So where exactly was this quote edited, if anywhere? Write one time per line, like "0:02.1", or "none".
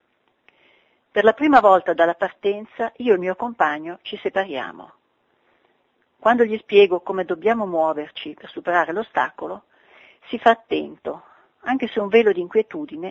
none

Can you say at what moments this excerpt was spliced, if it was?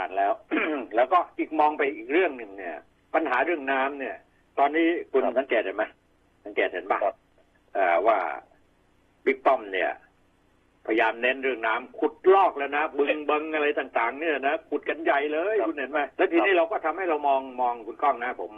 0:16.1

